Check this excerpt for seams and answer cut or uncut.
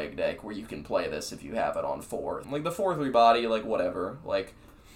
cut